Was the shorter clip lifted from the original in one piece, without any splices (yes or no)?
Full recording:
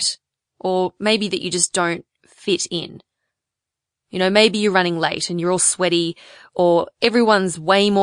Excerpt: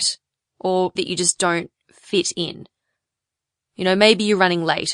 no